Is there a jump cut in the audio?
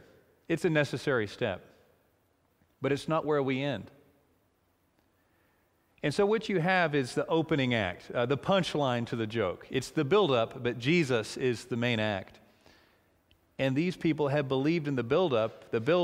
no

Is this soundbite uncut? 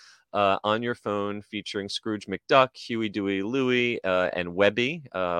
yes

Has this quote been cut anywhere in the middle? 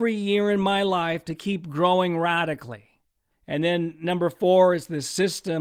yes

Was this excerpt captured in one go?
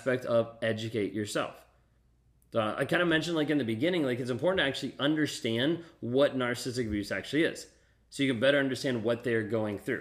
yes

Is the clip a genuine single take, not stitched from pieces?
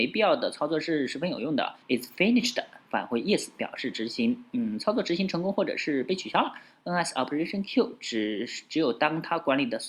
no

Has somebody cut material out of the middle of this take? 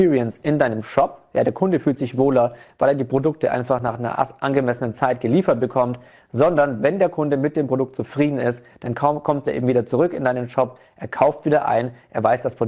no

